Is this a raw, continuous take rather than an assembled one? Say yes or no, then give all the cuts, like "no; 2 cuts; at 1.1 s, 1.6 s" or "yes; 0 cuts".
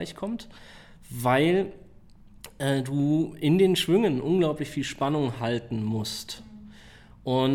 yes; 0 cuts